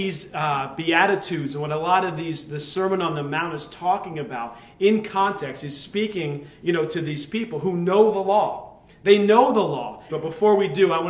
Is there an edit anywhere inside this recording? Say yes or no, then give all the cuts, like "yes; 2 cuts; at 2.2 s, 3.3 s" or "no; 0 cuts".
yes; 1 cut; at 10.1 s